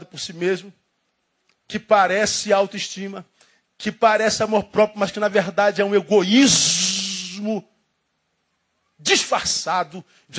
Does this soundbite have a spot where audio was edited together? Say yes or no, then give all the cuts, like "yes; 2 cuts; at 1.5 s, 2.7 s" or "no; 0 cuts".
no; 0 cuts